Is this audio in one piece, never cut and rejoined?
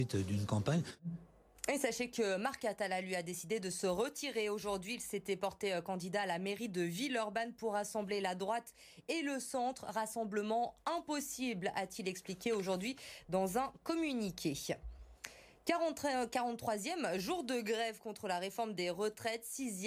yes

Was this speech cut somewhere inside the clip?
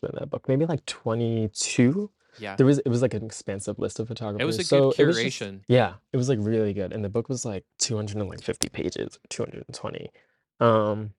yes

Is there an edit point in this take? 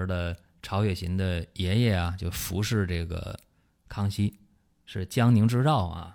no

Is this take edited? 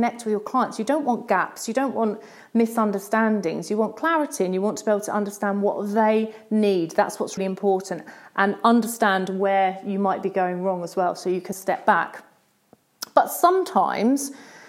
yes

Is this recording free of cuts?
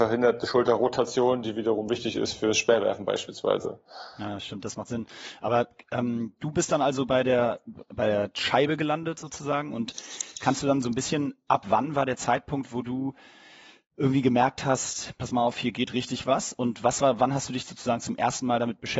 yes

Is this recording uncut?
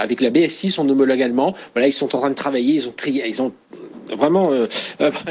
yes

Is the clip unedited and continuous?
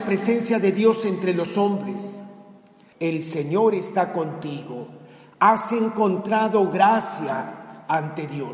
no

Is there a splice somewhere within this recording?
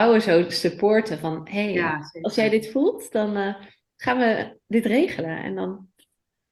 no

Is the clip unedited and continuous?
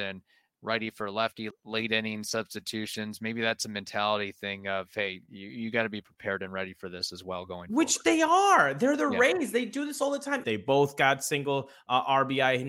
no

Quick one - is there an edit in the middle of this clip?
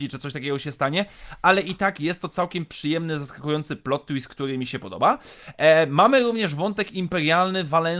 no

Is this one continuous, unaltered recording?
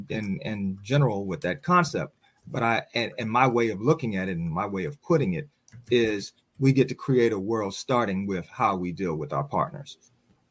yes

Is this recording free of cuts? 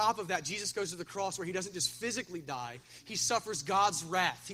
yes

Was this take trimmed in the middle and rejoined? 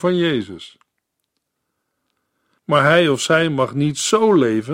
yes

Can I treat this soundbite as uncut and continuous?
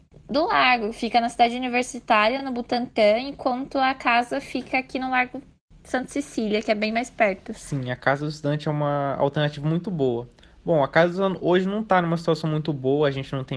yes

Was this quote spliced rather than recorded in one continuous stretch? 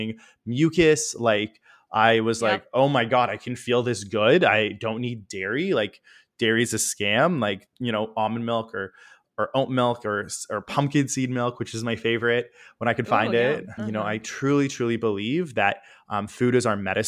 yes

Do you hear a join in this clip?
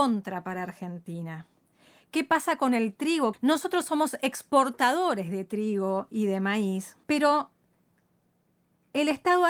yes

